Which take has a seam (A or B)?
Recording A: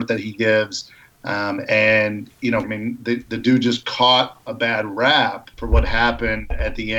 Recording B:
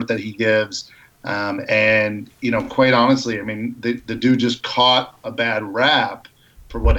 A